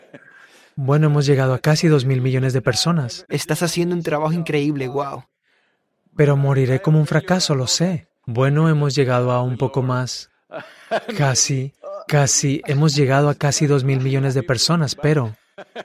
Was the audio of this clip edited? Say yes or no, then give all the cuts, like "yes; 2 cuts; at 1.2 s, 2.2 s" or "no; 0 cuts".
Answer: yes; 2 cuts; at 3.3 s, 8.2 s